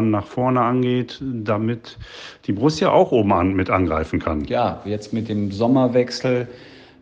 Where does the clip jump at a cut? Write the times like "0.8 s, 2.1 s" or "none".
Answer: none